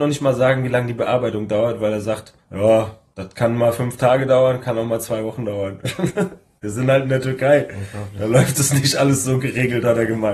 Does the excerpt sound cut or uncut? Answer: uncut